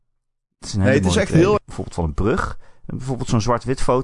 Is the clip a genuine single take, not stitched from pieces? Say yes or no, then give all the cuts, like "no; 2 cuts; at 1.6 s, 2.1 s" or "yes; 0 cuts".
no; 2 cuts; at 1.6 s, 2.9 s